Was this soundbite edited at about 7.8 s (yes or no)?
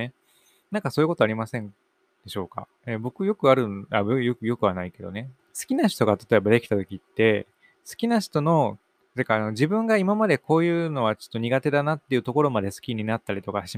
no